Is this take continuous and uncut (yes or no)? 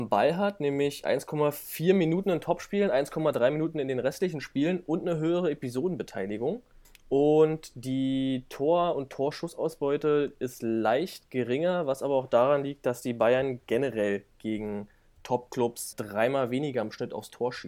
no